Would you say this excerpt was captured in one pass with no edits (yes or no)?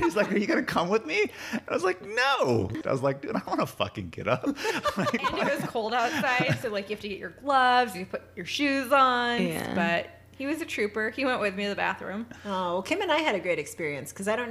no